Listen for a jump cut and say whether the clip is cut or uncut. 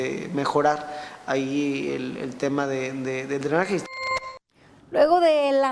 uncut